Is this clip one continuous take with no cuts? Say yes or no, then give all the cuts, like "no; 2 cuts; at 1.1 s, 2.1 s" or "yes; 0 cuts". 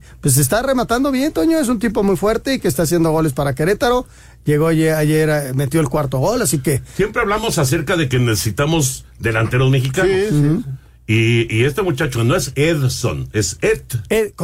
yes; 0 cuts